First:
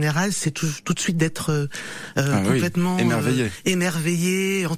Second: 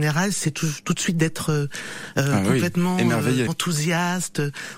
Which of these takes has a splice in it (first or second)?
second